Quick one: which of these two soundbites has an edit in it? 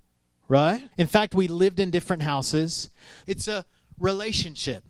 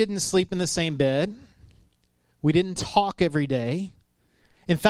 first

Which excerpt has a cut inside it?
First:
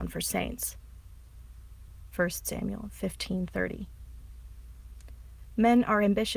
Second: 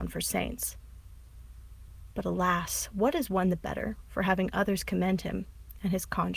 first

